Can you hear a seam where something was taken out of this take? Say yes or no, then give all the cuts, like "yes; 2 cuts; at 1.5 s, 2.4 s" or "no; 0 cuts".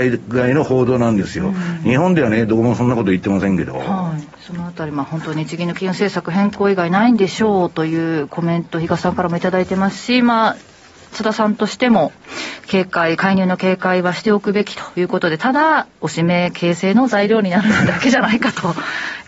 yes; 1 cut; at 4.3 s